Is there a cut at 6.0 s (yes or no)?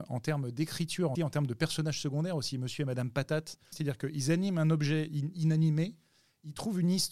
no